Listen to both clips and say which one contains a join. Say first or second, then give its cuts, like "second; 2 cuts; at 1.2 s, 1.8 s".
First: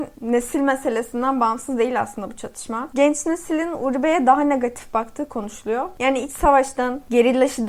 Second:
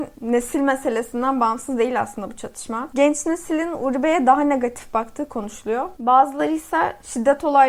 second; 1 cut; at 6.0 s